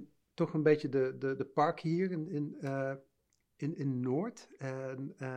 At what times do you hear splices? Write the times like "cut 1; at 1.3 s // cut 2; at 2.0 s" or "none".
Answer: none